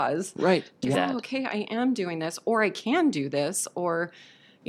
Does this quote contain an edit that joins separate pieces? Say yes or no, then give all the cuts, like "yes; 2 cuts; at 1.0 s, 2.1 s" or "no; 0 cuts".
yes; 1 cut; at 0.9 s